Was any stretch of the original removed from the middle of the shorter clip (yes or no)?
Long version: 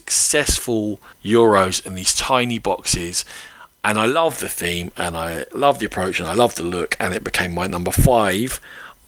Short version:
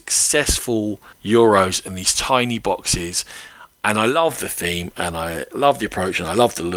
no